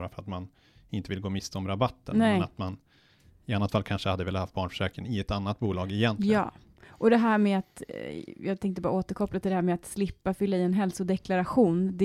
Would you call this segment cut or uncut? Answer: uncut